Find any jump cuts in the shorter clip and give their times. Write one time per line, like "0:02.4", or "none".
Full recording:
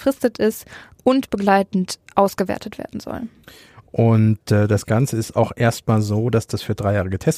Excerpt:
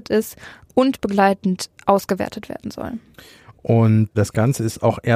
0:04.1